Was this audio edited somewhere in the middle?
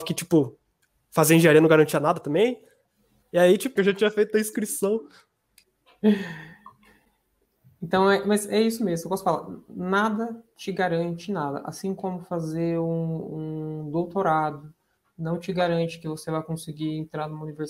yes; 1 cut; at 3.8 s

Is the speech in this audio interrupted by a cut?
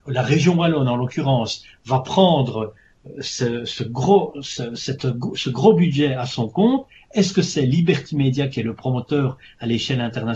no; 0 cuts

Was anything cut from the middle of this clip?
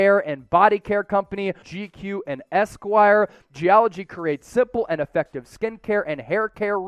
yes; 1 cut; at 1.6 s

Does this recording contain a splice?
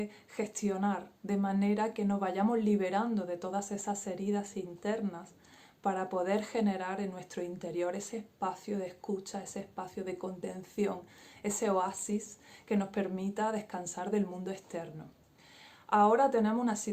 no; 0 cuts

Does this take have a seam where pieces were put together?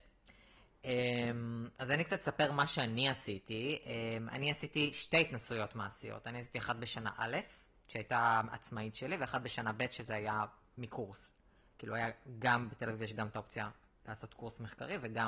no; 0 cuts

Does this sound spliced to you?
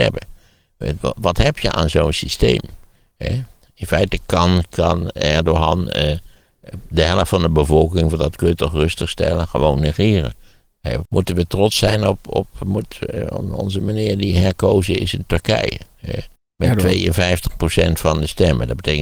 yes; 2 cuts; at 11.1 s, 16.4 s

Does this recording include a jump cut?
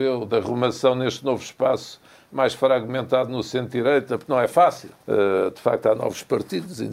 yes; 1 cut; at 5.0 s

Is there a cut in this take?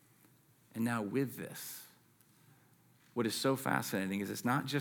no; 0 cuts

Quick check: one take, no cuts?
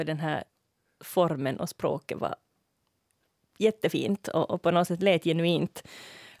yes; 0 cuts

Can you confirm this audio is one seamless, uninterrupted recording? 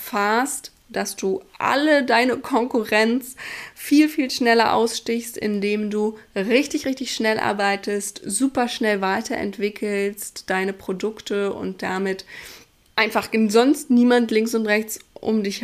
yes; 0 cuts

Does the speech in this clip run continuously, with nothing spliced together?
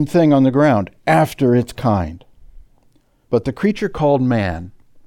no; 1 cut; at 3.2 s

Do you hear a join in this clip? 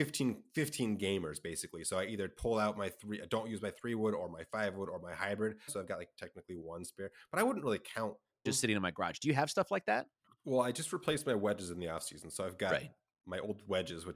yes; 2 cuts; at 5.7 s, 8.5 s

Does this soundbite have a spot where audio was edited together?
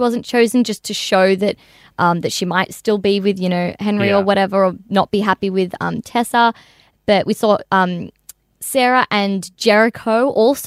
no; 0 cuts

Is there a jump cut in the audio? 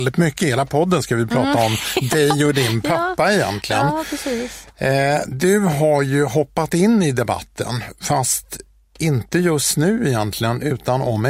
no; 0 cuts

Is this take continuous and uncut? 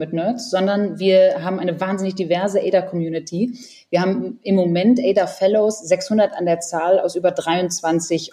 yes; 0 cuts

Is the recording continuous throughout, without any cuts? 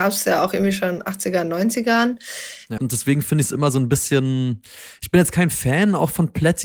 no; 1 cut; at 2.8 s

